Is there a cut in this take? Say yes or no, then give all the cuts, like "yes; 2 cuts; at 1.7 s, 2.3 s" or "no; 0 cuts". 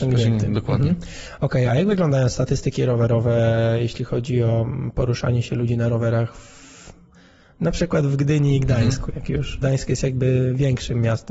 yes; 1 cut; at 9.6 s